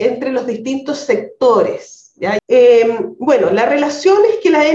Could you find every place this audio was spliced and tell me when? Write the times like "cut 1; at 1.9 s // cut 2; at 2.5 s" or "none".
cut 1; at 2.4 s